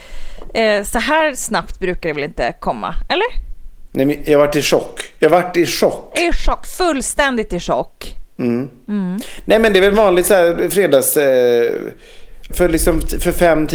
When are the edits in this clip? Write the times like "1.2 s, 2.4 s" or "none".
8.3 s, 12.5 s